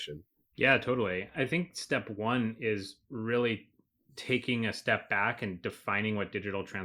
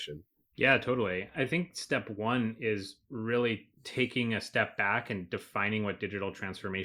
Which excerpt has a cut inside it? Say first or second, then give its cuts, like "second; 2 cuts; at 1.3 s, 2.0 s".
second; 1 cut; at 3.7 s